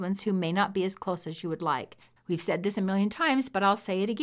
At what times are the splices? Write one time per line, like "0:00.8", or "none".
0:02.2